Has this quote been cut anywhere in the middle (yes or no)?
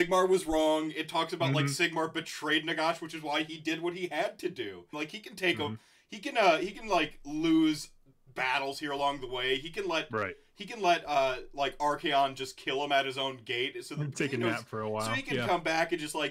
yes